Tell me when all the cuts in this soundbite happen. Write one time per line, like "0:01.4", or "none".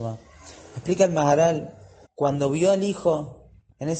0:02.0

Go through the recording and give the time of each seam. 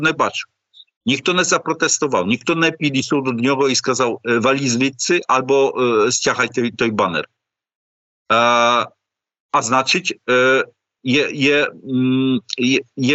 0:06.7

